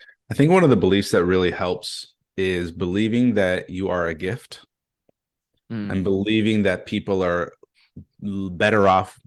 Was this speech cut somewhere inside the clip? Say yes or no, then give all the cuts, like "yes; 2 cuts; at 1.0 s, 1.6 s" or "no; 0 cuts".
no; 0 cuts